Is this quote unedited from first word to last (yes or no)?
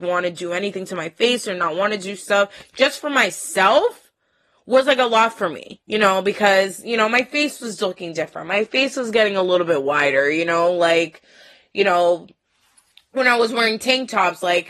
yes